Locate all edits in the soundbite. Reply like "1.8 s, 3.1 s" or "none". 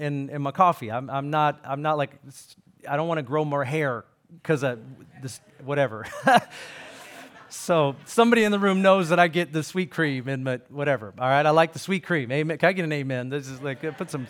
none